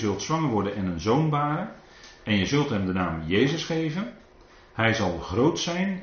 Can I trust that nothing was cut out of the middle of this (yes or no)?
yes